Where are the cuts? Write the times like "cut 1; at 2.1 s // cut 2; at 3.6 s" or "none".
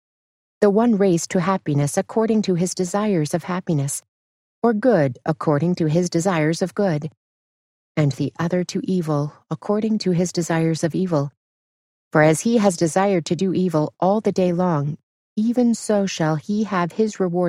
none